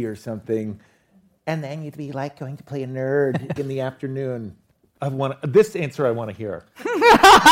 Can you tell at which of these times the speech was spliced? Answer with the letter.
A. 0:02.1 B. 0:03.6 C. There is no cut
B